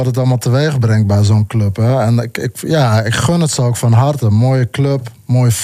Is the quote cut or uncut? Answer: uncut